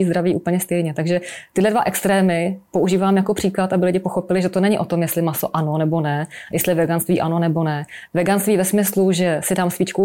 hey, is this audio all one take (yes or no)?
no